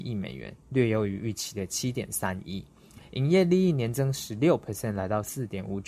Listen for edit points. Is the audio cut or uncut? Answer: uncut